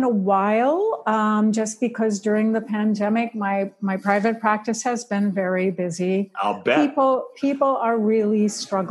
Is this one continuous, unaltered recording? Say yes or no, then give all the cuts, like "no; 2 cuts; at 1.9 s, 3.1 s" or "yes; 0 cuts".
yes; 0 cuts